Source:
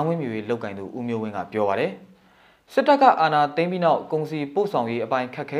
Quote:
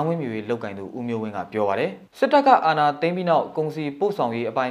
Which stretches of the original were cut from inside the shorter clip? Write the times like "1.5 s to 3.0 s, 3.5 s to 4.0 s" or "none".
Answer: 2.1 s to 2.6 s